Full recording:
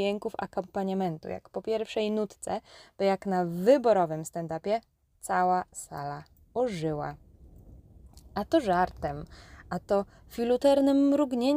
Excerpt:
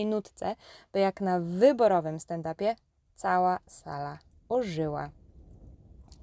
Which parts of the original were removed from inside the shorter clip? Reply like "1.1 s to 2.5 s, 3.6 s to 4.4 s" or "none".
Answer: none

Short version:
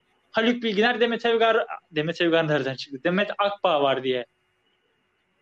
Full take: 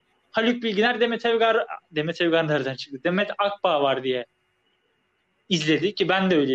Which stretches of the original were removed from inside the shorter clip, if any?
none

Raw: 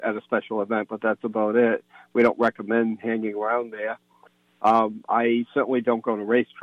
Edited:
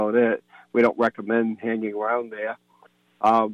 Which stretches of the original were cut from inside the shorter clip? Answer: none

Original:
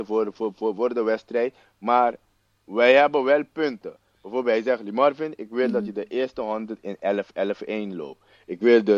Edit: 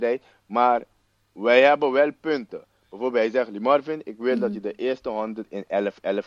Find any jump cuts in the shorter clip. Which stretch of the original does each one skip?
none

